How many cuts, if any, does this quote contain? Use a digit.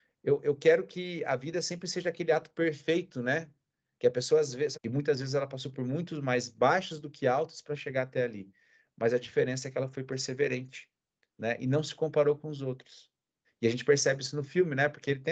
2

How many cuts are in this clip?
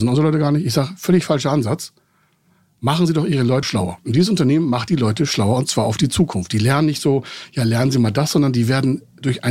1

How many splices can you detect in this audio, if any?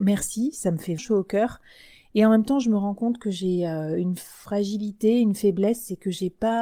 1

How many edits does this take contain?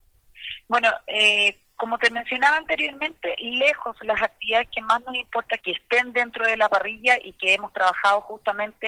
1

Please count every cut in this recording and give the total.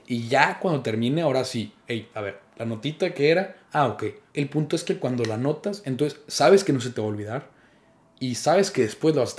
1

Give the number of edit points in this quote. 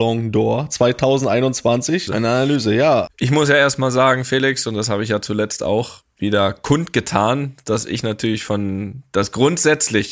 2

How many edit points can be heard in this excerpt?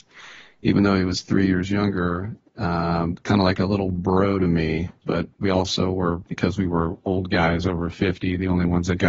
1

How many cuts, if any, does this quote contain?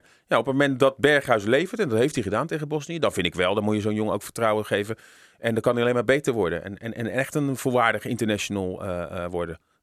0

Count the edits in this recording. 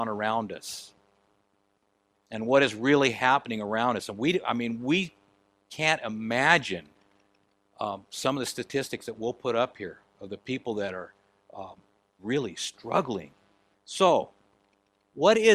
2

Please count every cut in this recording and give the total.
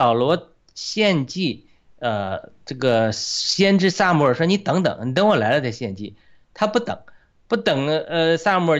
0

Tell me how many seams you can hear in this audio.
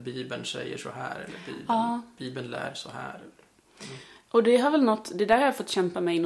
0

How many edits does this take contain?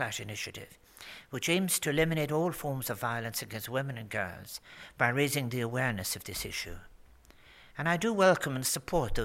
0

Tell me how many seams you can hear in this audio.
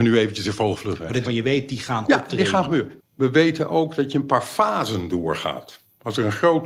2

